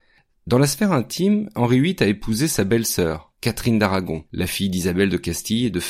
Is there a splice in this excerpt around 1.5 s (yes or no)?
no